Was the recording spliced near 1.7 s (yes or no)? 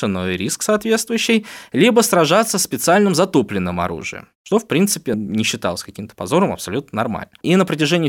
no